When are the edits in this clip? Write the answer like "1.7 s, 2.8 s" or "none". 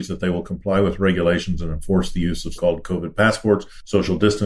2.6 s